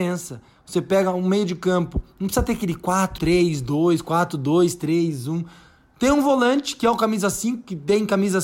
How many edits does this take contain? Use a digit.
1